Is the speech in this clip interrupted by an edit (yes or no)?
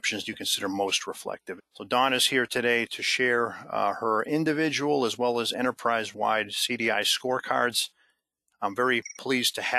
yes